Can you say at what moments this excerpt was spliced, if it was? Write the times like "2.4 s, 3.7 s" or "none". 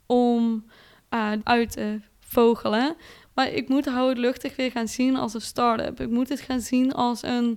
1.4 s, 3.2 s